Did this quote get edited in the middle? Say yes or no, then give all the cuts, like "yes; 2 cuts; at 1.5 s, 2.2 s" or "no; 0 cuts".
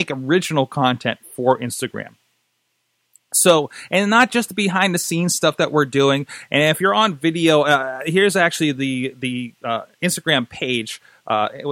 no; 0 cuts